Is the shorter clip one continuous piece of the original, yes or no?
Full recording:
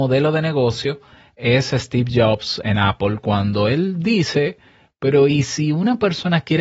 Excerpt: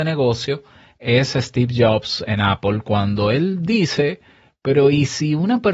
yes